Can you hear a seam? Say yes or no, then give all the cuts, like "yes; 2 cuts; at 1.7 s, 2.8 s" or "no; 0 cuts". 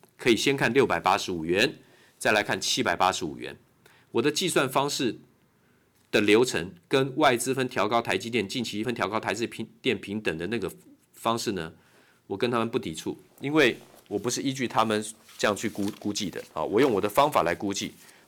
yes; 2 cuts; at 7.5 s, 8.8 s